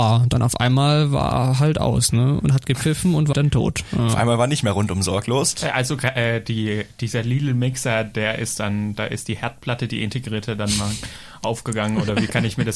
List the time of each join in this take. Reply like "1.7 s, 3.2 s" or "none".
3.3 s, 5.6 s